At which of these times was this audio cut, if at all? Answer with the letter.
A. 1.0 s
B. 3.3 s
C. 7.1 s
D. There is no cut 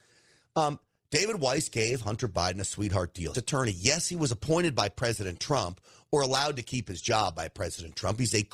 B